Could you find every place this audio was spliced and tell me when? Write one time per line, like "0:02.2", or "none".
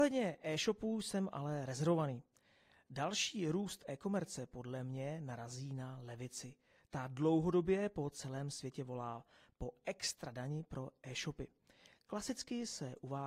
none